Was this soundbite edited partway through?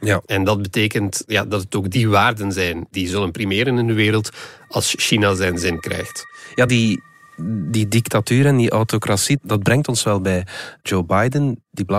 no; 0 cuts

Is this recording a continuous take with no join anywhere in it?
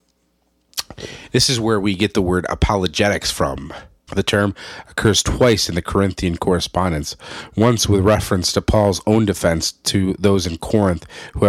no; 1 cut; at 4.1 s

